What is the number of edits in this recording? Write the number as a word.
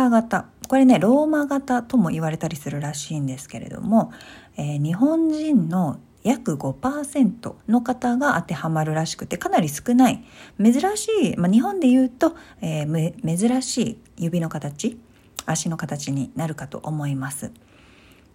one